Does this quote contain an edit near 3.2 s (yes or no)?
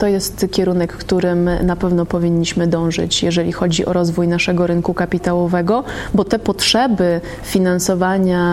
no